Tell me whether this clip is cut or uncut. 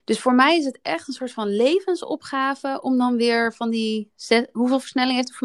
uncut